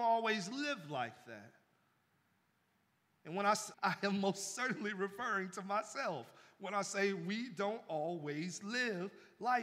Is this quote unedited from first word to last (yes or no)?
no